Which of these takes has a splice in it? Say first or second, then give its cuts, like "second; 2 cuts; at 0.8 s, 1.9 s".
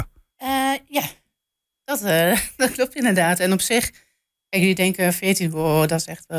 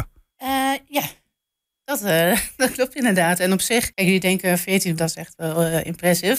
second; 2 cuts; at 3.9 s, 5.0 s